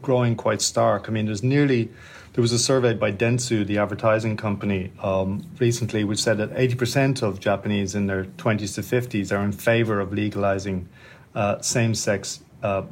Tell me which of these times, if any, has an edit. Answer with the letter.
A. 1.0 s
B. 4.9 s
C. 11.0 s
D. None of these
D